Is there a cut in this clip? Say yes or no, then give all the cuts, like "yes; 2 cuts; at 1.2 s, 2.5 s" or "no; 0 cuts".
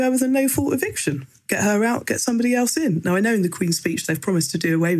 no; 0 cuts